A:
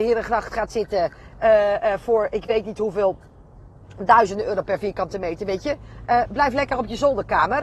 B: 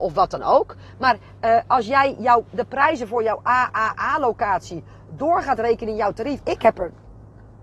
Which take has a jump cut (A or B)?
B